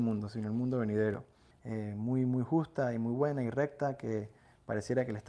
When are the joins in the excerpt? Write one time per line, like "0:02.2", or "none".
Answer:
0:01.5